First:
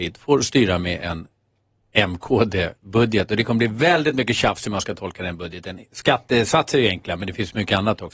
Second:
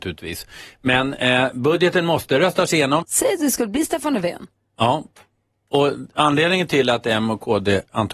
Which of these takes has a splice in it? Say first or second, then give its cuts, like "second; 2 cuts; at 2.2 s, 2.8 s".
second; 1 cut; at 3.0 s